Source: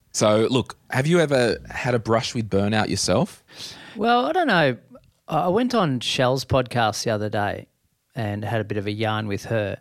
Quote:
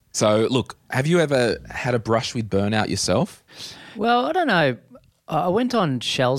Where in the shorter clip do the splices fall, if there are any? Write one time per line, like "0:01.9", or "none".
none